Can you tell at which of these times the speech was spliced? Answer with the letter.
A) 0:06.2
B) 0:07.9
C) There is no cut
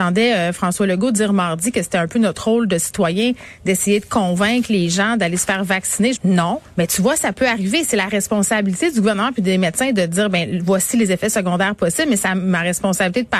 A